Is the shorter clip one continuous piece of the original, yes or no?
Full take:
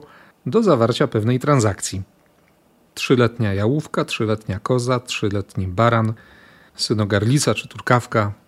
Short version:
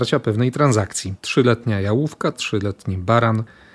no